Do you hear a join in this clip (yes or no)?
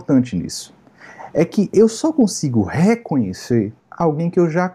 yes